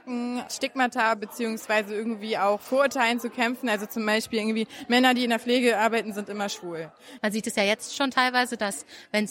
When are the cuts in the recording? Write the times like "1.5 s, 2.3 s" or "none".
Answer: 7.2 s